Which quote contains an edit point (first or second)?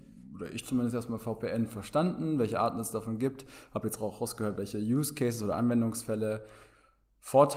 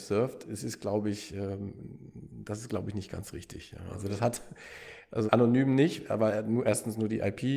second